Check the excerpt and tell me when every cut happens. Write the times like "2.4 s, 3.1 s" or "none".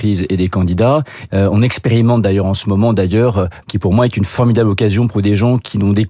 1.3 s, 3.6 s